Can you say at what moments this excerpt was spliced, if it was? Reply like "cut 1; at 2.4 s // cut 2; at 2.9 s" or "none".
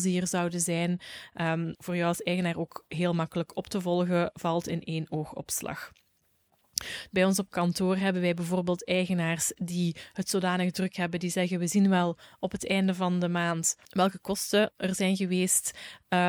cut 1; at 1.8 s // cut 2; at 7.1 s // cut 3; at 13.9 s